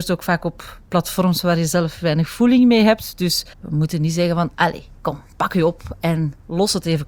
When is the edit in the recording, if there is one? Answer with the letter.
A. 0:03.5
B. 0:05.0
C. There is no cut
A